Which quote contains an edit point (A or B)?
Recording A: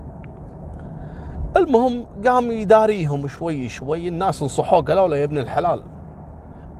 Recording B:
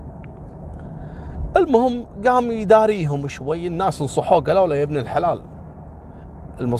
B